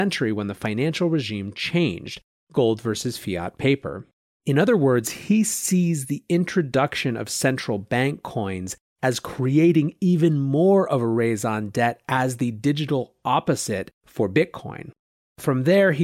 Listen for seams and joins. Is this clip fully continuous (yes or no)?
yes